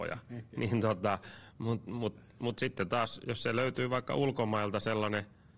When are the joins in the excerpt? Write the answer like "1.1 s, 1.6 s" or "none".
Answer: none